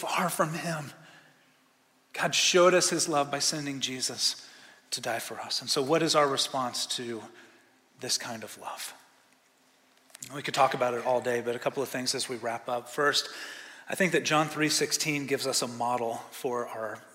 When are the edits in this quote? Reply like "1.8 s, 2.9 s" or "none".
none